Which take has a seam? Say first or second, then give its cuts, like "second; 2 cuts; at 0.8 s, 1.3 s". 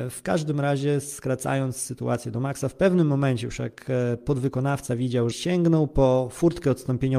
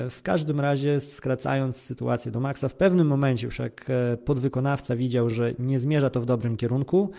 first; 1 cut; at 5.3 s